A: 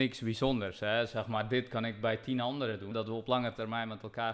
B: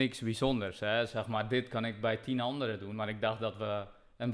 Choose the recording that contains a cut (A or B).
A